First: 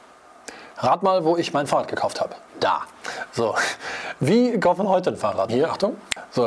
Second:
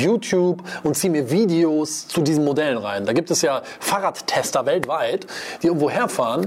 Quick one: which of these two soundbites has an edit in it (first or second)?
first